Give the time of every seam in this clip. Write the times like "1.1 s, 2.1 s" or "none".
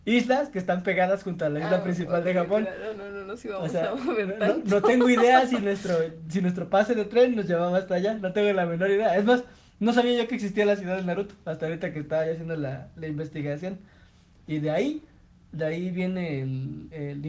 none